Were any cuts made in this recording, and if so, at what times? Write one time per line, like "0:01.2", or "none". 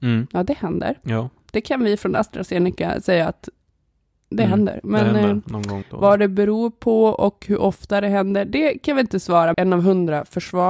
0:05.8
0:09.5